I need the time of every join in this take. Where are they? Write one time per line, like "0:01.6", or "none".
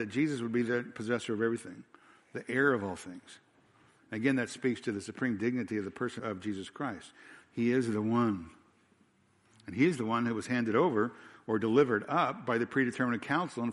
0:06.2
0:09.5